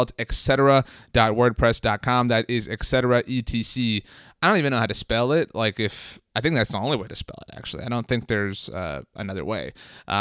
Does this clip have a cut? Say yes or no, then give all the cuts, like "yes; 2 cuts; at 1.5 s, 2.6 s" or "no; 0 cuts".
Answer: no; 0 cuts